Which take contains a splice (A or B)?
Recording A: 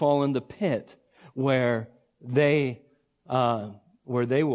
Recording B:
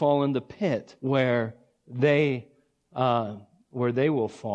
B